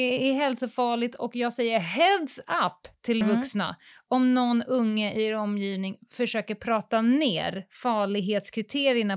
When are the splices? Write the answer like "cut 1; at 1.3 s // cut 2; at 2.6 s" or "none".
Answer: cut 1; at 3.2 s

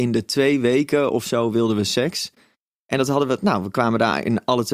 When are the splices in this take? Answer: none

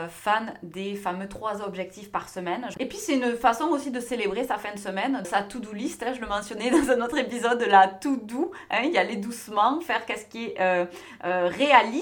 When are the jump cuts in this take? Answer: cut 1; at 2.7 s // cut 2; at 5.2 s

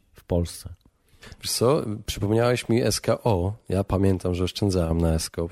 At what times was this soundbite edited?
none

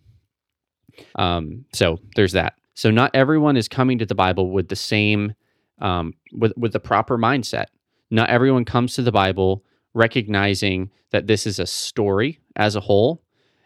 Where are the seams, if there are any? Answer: cut 1; at 1.1 s // cut 2; at 2.7 s

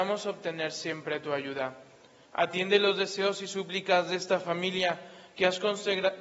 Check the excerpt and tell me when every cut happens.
cut 1; at 2.3 s

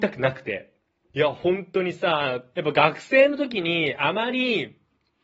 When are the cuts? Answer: cut 1; at 1.1 s // cut 2; at 2.5 s

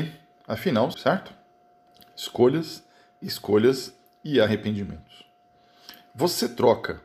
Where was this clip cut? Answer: cut 1; at 0.9 s

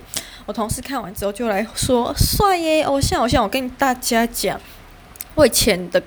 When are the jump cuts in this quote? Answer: none

